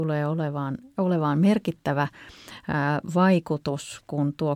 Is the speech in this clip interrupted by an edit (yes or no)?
no